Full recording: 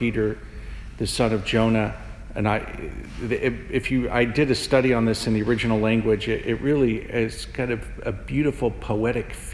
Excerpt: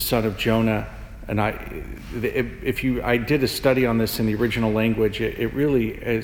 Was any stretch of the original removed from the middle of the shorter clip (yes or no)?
no